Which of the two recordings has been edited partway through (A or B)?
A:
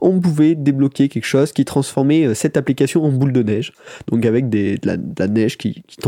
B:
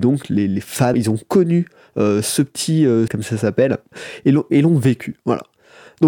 B